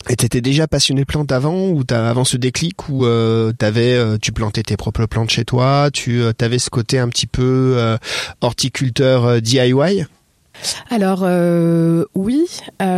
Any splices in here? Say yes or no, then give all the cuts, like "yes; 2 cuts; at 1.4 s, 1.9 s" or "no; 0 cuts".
no; 0 cuts